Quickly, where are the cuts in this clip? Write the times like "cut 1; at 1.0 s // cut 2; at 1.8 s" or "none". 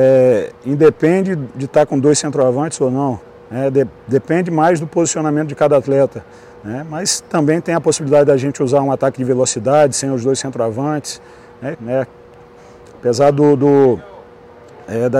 cut 1; at 11.7 s